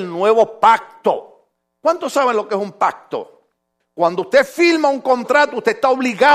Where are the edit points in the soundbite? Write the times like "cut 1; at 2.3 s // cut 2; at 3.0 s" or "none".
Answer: cut 1; at 3.8 s